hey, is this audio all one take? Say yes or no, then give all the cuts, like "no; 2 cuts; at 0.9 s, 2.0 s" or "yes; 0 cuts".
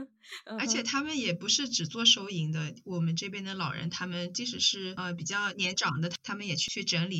yes; 0 cuts